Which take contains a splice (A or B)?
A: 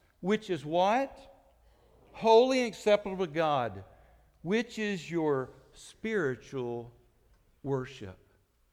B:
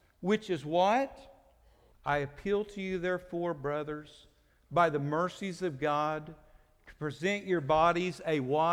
B